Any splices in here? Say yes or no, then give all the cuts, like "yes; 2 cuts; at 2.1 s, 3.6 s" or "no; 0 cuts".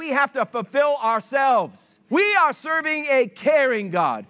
yes; 1 cut; at 2.1 s